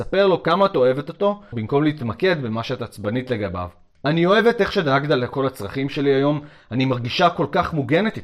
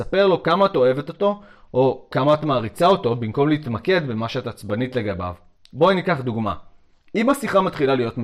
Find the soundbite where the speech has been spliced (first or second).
first